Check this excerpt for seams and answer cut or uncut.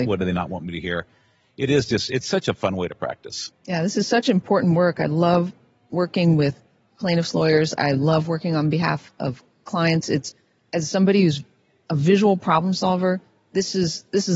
cut